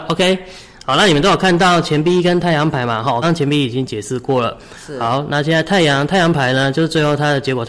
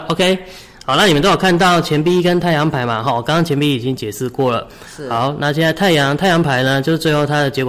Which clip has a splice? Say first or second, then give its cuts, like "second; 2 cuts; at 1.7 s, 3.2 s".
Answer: first; 1 cut; at 3.2 s